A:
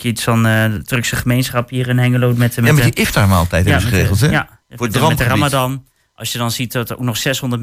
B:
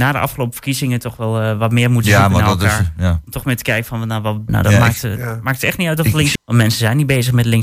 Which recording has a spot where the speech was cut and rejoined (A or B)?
B